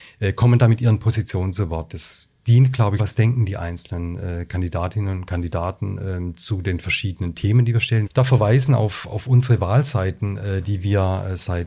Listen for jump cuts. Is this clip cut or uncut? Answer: cut